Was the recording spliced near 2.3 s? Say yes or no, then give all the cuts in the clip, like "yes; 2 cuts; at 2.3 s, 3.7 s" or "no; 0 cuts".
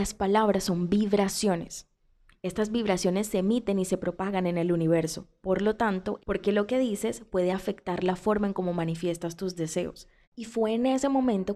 no; 2 cuts; at 6.2 s, 10.2 s